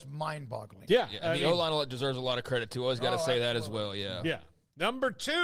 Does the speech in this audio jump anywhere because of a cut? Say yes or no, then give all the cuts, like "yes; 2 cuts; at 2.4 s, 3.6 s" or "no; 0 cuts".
no; 0 cuts